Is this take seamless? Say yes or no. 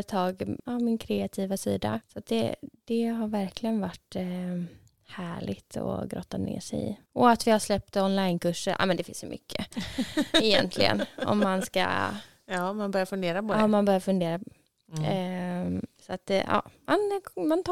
yes